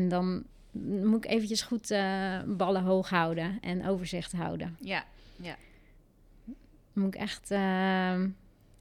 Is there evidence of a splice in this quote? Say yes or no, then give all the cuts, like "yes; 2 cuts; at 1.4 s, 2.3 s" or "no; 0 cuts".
no; 0 cuts